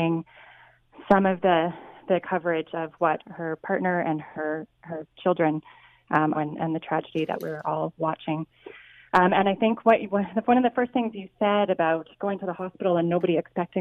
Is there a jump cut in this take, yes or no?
yes